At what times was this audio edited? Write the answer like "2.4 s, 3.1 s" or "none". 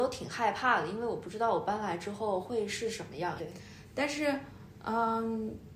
3.4 s